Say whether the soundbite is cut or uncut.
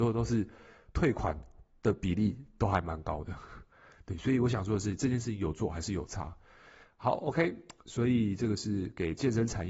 uncut